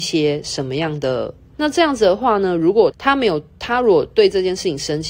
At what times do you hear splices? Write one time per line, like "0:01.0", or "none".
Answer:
0:01.5
0:02.9

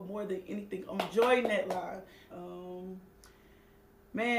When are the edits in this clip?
0:02.3

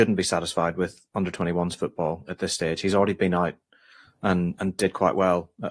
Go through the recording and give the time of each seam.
none

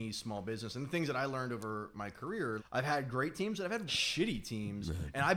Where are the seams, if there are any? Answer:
0:02.6
0:03.9

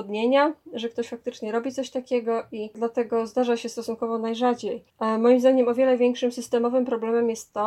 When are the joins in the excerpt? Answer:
0:04.9

